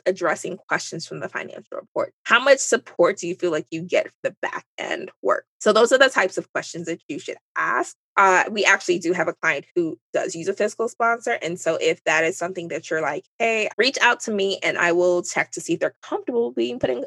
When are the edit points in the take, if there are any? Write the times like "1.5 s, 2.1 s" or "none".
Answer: 13.7 s